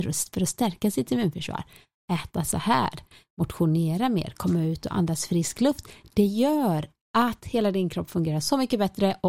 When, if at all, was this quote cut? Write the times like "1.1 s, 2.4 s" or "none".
none

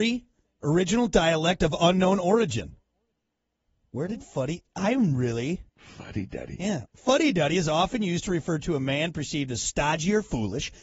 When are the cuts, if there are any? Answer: 5.7 s, 6.9 s

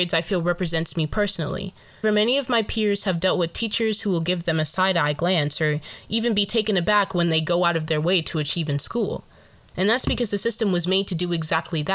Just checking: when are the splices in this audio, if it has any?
2.0 s, 9.7 s

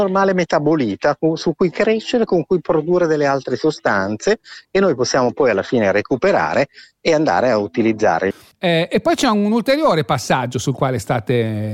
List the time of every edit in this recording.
none

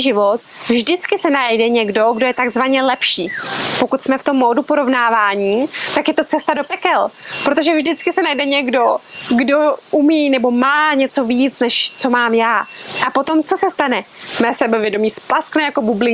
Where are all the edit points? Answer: none

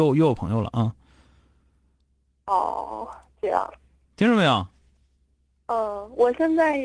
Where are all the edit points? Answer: none

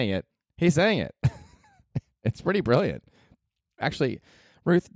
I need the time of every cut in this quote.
3.8 s

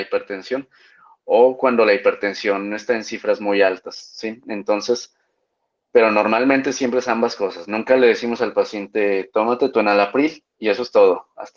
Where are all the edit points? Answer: none

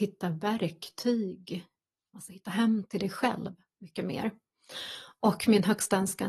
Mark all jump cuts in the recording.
2.1 s

